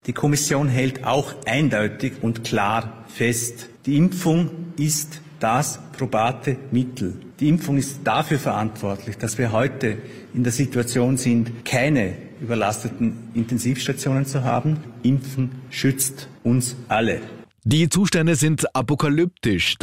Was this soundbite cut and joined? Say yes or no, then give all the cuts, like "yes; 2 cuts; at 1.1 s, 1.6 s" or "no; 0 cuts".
yes; 1 cut; at 17.5 s